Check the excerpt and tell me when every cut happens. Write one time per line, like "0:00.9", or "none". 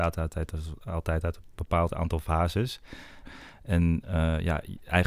0:03.2